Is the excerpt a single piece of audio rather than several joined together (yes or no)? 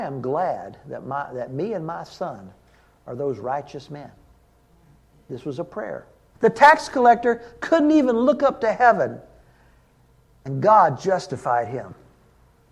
no